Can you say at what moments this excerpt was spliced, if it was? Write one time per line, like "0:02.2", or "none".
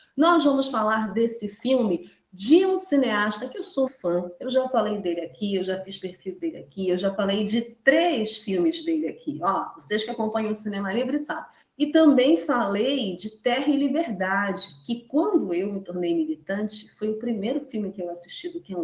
0:03.9
0:11.6